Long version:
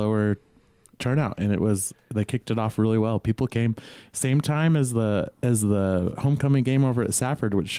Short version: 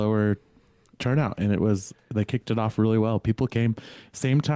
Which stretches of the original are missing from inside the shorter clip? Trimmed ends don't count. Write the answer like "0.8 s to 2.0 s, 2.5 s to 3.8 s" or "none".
none